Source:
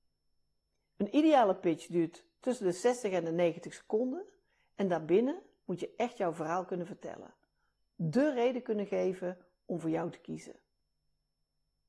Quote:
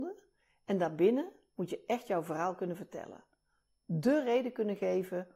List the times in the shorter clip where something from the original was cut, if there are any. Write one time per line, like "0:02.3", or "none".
none